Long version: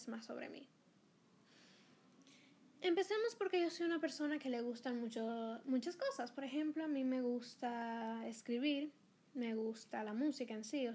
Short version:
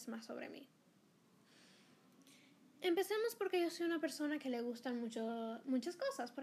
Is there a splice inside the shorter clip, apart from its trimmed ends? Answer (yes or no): no